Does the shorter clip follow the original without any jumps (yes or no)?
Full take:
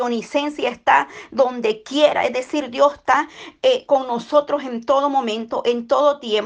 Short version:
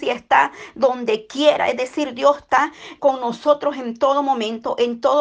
no